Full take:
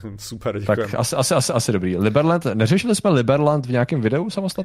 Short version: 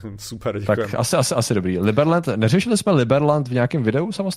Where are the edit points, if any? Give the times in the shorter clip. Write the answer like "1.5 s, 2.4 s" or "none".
1.1 s